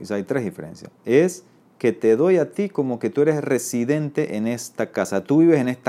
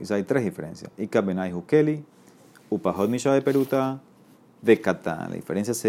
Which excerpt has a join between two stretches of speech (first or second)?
first